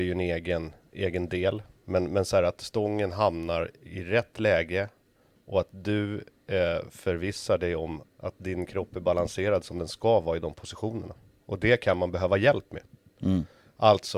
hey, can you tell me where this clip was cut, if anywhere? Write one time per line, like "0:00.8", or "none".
0:08.0

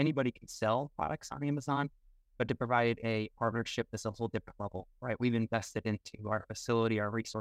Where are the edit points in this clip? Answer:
none

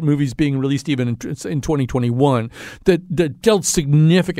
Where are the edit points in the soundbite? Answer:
none

